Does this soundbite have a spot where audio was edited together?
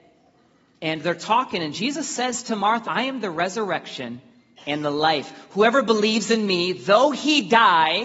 yes; 1 cut; at 2.8 s

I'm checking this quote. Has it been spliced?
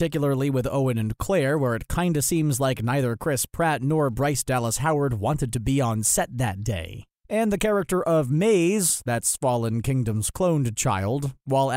no; 0 cuts

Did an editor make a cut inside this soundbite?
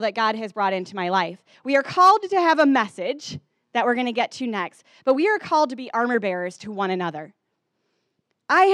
yes; 1 cut; at 1.5 s

